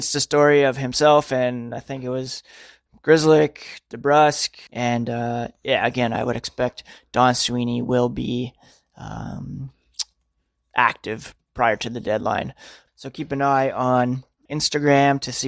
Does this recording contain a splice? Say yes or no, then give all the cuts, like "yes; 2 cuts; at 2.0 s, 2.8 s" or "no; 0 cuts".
yes; 3 cuts; at 4.7 s, 12.9 s, 14.5 s